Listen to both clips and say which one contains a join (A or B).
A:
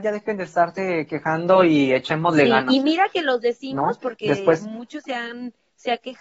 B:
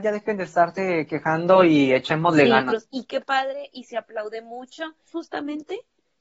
B